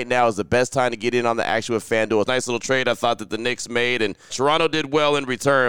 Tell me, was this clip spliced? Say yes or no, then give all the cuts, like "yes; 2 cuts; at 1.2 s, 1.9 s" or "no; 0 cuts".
yes; 2 cuts; at 2.2 s, 4.3 s